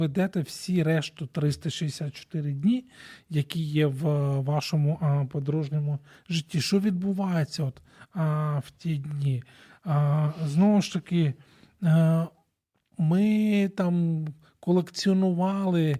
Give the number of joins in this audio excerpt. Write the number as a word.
zero